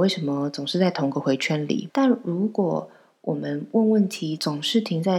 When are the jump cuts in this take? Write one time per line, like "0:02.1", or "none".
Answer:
0:01.9